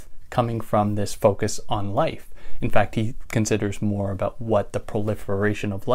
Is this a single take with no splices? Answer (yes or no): yes